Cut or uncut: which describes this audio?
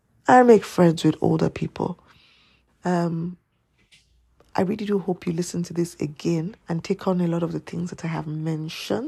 cut